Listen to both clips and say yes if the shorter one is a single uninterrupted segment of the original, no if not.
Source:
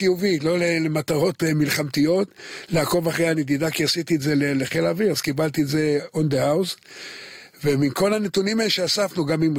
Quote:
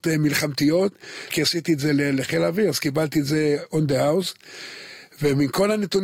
no